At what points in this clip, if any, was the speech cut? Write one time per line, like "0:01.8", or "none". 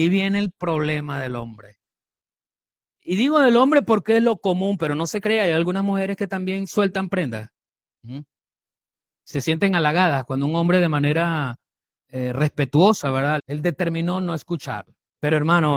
0:13.4